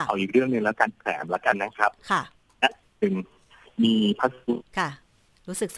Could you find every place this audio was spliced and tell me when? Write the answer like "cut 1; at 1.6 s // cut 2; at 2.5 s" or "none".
cut 1; at 4.7 s

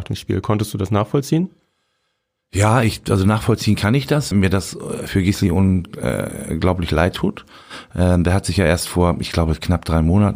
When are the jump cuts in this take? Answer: cut 1; at 4.3 s

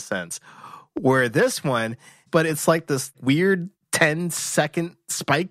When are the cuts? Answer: cut 1; at 2.3 s

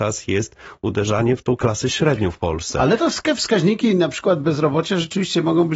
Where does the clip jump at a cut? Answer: none

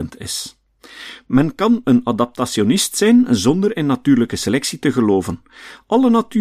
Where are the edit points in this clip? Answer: none

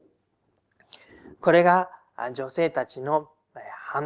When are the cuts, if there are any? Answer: none

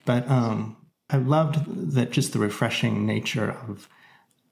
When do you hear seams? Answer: cut 1; at 1.1 s

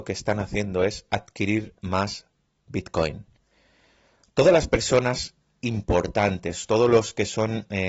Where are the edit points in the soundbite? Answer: none

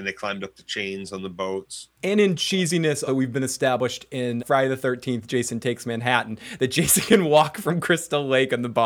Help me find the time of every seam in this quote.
cut 1; at 3.1 s // cut 2; at 4.4 s

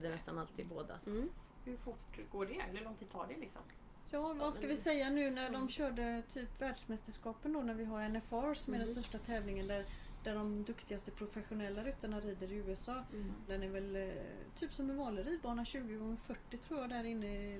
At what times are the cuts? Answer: cut 1; at 1.0 s // cut 2; at 13.5 s

